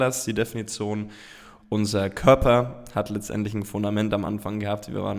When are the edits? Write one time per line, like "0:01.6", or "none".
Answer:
0:01.6